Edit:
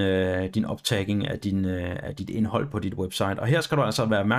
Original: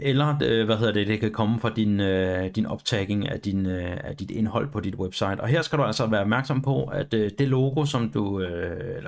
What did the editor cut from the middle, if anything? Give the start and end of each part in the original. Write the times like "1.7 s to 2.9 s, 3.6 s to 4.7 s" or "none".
none